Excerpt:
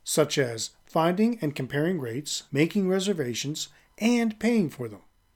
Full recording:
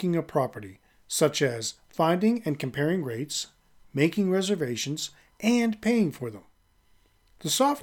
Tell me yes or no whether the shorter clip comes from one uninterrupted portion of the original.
no